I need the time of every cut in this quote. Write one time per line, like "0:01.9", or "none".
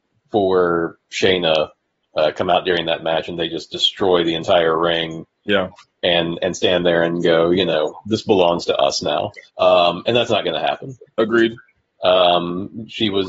0:09.5
0:11.1

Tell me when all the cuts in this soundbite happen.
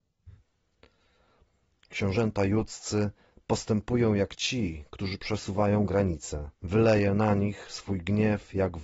0:06.5

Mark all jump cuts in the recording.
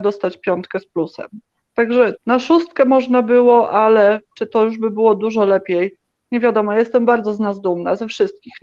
0:02.1

